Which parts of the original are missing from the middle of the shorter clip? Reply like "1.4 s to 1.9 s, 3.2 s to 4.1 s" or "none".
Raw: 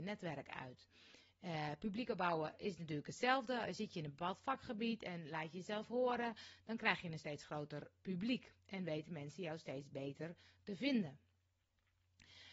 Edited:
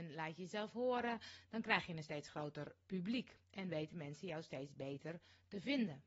none